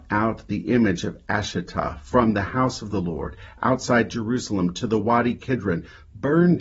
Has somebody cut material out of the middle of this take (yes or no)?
no